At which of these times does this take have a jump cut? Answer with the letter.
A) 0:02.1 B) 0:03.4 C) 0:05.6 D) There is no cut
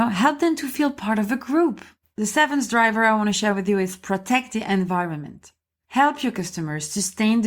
A